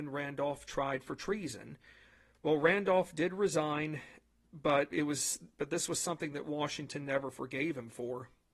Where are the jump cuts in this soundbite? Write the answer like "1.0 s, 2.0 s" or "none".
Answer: 4.9 s